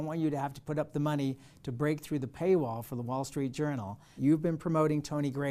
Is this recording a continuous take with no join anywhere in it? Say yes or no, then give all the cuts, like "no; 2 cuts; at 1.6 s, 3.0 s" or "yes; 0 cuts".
no; 1 cut; at 4.2 s